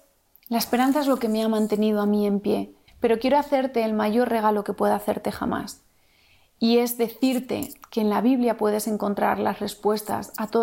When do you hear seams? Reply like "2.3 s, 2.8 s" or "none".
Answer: 2.9 s